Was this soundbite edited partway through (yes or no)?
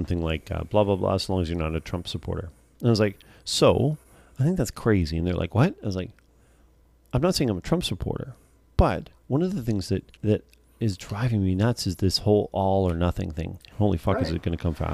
yes